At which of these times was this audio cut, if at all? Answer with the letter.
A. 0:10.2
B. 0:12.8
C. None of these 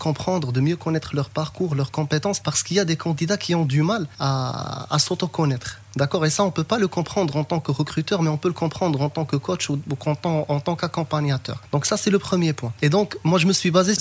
B